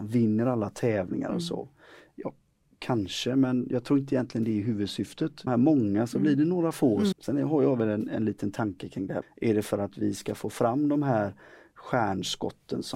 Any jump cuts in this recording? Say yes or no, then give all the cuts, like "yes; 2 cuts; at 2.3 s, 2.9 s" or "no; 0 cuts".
yes; 3 cuts; at 5.5 s, 7.1 s, 9.2 s